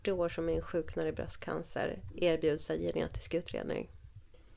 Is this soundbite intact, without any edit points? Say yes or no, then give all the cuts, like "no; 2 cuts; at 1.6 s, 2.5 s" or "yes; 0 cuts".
no; 1 cut; at 2.1 s